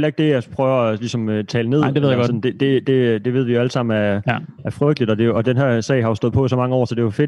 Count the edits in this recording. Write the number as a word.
zero